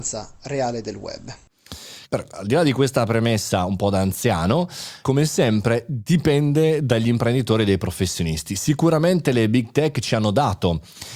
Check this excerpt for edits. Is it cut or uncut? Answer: cut